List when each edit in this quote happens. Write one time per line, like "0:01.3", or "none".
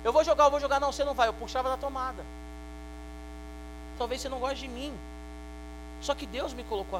0:03.9